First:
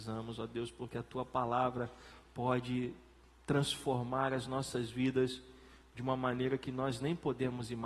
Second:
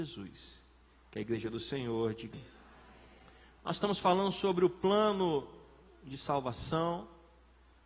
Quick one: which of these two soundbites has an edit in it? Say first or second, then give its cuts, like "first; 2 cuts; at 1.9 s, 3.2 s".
second; 1 cut; at 2.3 s